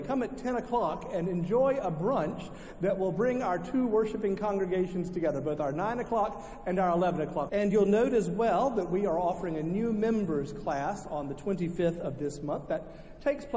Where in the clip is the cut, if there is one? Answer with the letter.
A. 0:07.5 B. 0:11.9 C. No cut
A